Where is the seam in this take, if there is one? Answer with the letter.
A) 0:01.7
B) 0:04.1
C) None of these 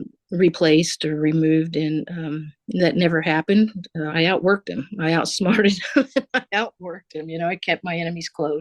B